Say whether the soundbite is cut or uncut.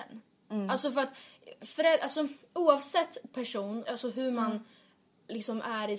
cut